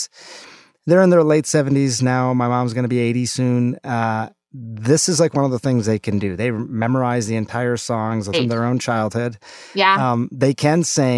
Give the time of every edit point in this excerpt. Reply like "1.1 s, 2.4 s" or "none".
8.3 s